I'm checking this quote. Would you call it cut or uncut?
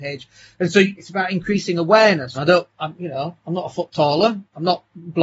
cut